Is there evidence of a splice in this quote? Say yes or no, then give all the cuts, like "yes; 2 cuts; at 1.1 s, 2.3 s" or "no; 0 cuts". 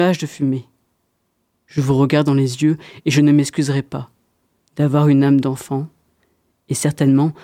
yes; 1 cut; at 1.5 s